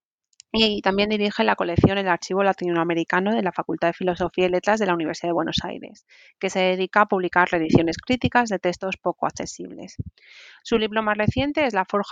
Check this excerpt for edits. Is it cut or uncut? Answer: uncut